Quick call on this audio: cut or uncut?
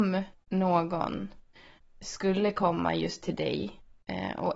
uncut